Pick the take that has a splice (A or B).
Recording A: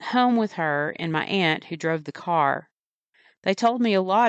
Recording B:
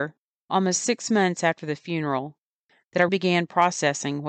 B